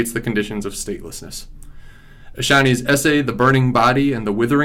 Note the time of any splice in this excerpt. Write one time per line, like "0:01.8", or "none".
none